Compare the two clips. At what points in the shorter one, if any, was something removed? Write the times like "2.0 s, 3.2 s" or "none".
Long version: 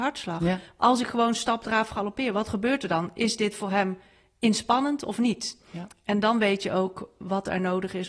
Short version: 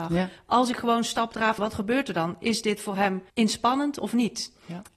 1.6 s, 3.3 s